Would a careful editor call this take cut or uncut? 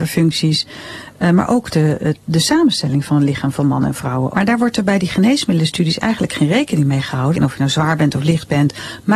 cut